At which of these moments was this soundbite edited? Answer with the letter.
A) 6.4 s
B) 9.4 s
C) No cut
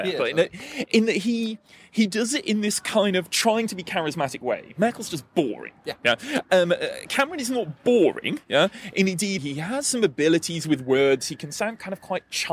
B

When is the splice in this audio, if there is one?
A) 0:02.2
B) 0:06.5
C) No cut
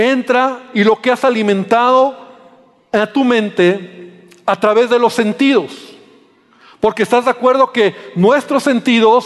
C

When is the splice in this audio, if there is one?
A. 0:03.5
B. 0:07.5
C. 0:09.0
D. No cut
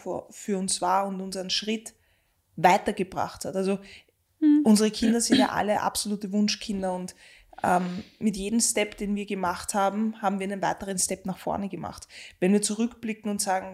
D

